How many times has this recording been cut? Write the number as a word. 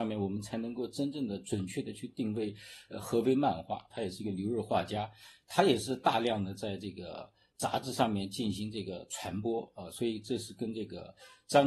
one